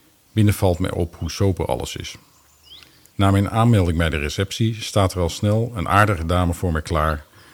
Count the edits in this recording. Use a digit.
1